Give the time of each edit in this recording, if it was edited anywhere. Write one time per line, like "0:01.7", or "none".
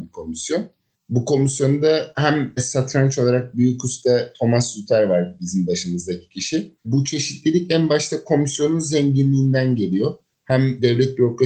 0:06.8